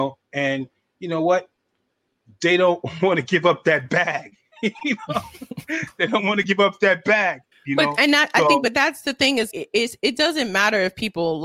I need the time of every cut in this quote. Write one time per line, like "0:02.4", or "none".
0:07.5
0:09.5